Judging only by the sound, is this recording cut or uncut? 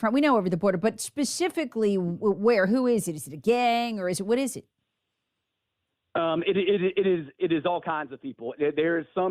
uncut